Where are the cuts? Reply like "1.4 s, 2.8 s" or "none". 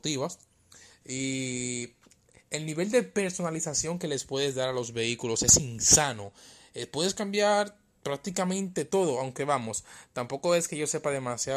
1.0 s